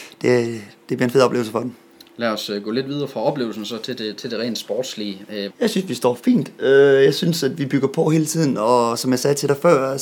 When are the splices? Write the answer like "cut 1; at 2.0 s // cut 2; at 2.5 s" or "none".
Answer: cut 1; at 5.5 s